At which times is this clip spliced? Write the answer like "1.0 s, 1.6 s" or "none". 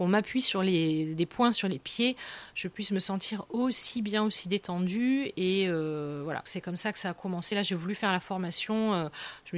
none